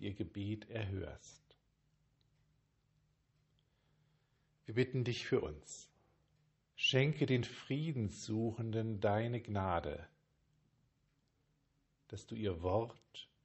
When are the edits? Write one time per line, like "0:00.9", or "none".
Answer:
0:06.7